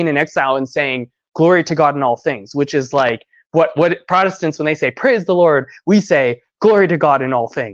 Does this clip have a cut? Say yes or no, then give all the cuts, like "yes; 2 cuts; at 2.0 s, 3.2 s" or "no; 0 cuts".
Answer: no; 0 cuts